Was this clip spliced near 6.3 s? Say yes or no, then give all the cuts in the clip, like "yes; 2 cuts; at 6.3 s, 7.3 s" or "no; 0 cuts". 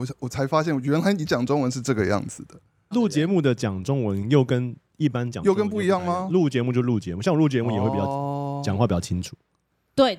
no; 1 cut; at 2.9 s